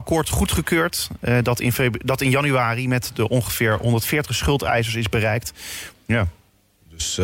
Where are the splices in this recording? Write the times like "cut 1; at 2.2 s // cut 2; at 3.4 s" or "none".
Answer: cut 1; at 5.9 s